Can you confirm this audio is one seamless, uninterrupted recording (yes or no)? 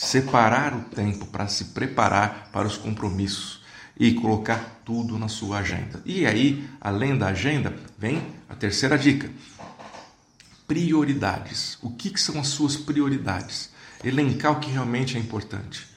yes